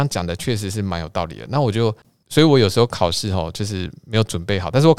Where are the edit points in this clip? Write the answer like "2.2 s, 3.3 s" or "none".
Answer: none